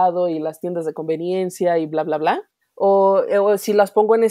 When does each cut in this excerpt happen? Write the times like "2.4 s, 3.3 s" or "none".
2.6 s